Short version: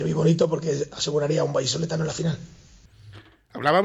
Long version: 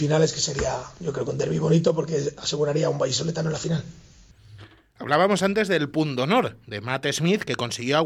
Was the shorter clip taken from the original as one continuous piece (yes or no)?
yes